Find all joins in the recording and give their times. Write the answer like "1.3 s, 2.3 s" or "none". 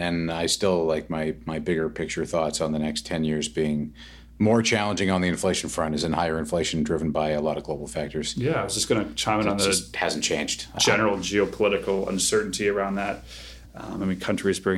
none